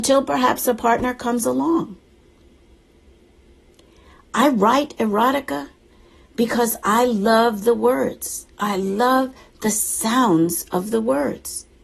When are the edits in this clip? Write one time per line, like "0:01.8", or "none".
none